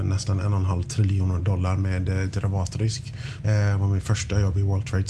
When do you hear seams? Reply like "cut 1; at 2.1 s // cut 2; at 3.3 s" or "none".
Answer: cut 1; at 3.4 s